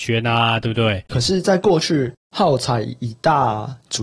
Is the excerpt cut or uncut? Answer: cut